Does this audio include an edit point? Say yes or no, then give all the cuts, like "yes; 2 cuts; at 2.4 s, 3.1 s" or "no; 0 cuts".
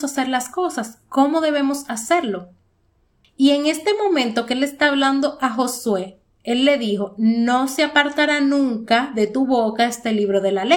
no; 0 cuts